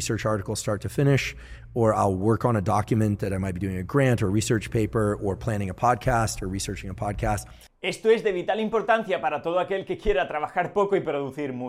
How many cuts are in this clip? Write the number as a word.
zero